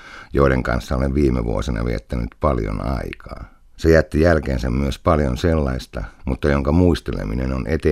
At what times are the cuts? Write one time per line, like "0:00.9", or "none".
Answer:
0:03.8
0:06.2